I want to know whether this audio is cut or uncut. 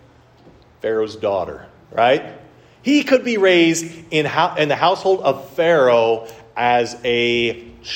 uncut